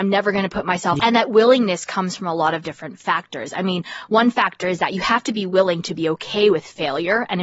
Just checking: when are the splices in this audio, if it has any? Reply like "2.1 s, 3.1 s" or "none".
1.0 s